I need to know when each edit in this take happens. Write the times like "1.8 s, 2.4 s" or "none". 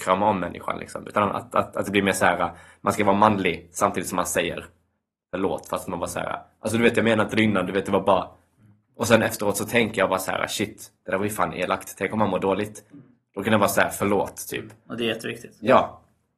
8.9 s